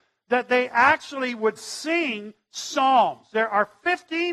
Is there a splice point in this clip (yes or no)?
no